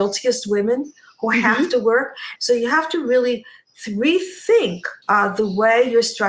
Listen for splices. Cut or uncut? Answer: cut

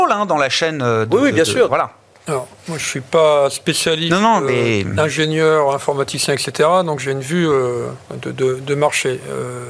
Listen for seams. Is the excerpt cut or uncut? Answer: cut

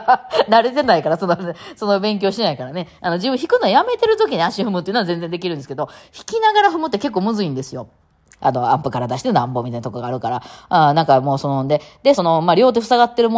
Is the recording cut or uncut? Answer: cut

